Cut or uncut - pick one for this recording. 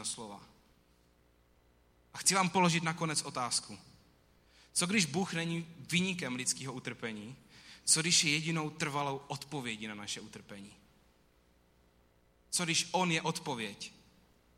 uncut